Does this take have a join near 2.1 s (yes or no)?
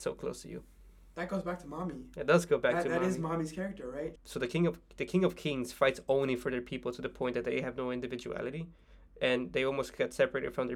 no